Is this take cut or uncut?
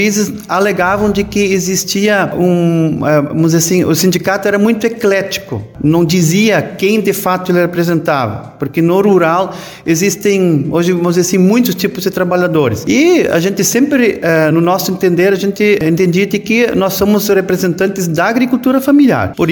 uncut